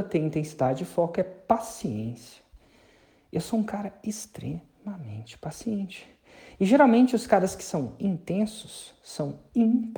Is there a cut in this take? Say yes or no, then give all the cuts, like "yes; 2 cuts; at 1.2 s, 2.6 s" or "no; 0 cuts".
no; 0 cuts